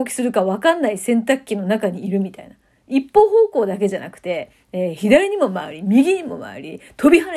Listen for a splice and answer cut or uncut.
uncut